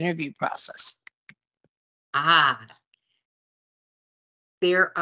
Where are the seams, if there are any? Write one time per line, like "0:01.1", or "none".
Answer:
none